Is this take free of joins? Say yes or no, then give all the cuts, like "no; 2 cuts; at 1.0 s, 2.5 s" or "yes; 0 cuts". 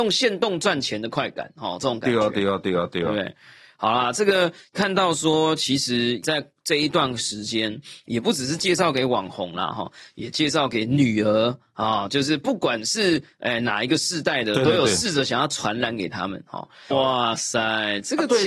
no; 1 cut; at 16.9 s